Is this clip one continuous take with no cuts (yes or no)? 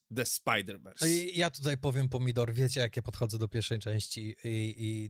yes